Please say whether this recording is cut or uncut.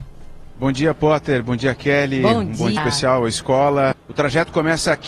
cut